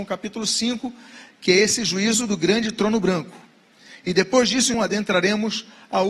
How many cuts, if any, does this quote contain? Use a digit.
2